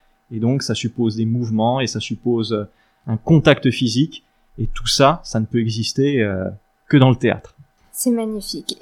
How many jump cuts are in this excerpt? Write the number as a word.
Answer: zero